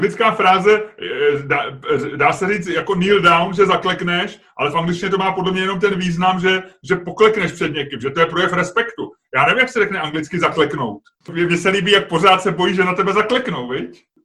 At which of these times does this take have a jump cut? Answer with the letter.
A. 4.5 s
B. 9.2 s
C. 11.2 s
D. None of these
C